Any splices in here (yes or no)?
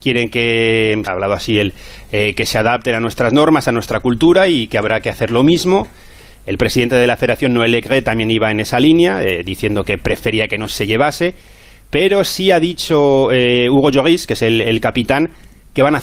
yes